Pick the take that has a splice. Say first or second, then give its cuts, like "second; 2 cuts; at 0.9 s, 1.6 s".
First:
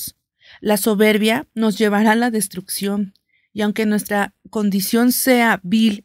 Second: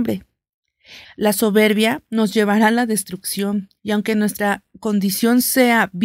second; 2 cuts; at 1.0 s, 3.8 s